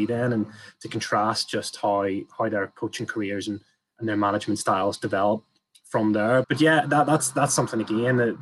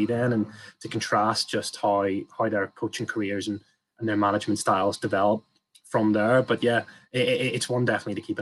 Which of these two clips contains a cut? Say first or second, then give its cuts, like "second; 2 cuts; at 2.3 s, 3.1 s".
first; 1 cut; at 6.4 s